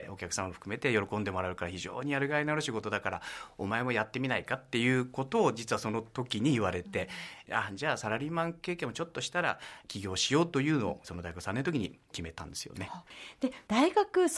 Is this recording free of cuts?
no; 1 cut; at 11.0 s

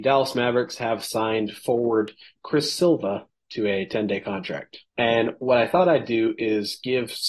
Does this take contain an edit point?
yes; 1 cut; at 4.9 s

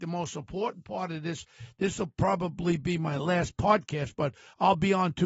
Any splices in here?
no; 0 cuts

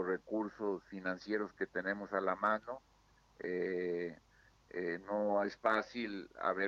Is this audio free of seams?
yes; 0 cuts

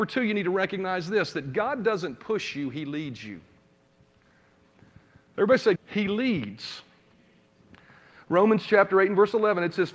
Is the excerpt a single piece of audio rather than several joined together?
no; 1 cut; at 5.7 s

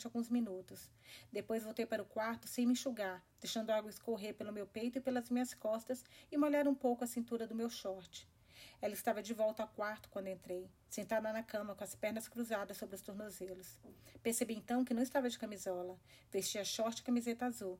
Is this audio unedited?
yes; 0 cuts

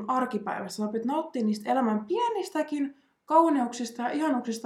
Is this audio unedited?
yes; 0 cuts

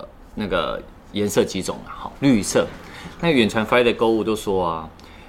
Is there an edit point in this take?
yes; 1 cut; at 2.2 s

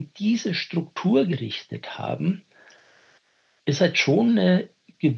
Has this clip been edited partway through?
no; 0 cuts

